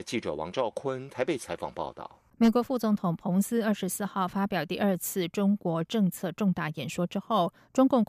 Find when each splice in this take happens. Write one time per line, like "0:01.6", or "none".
0:02.3